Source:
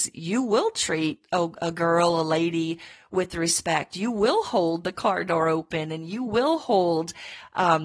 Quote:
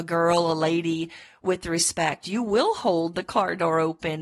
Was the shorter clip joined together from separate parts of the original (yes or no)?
no